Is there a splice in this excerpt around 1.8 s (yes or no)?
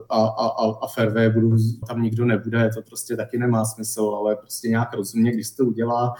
yes